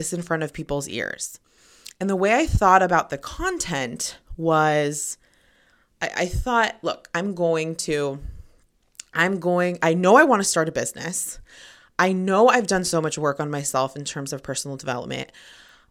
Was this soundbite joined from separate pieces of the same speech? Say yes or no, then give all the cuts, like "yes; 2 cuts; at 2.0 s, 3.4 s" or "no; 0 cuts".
no; 0 cuts